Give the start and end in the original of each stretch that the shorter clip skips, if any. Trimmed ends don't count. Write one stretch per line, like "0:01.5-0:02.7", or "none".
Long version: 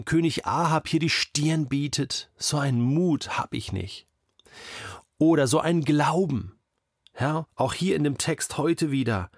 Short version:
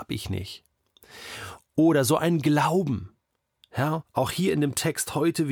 none